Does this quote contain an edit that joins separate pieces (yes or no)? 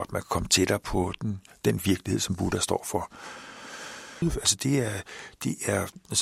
yes